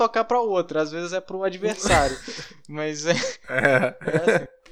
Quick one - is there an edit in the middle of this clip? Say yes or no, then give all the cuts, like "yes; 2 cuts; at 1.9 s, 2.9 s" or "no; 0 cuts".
no; 0 cuts